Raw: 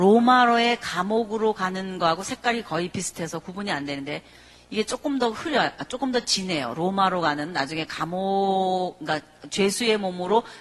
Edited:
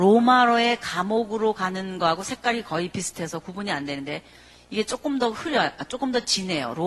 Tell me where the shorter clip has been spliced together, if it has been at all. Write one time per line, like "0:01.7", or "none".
none